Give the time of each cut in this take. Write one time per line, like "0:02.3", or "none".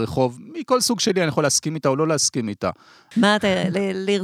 0:03.1